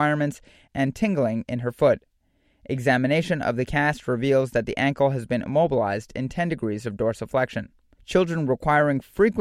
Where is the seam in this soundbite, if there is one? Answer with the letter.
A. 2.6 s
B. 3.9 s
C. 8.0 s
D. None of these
C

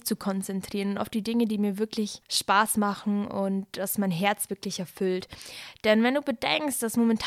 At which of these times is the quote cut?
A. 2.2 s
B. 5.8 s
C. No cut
A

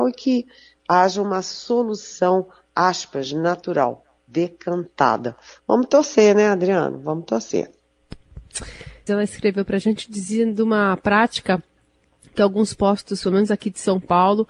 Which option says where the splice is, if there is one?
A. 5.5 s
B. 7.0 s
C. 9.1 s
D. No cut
C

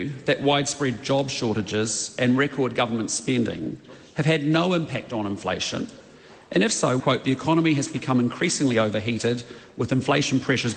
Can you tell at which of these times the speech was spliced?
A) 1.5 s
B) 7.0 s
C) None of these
B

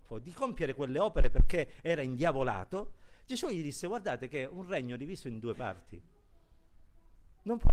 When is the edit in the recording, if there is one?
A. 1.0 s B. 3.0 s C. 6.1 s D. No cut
D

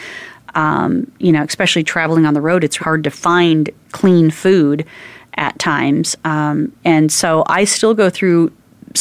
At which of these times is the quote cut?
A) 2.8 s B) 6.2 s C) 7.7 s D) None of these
A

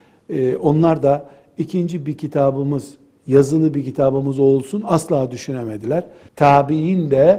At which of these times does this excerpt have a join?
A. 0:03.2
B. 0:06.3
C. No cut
B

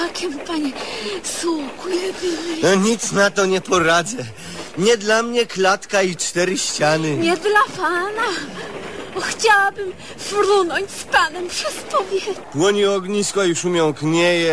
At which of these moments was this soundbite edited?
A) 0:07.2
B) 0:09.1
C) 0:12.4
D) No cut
C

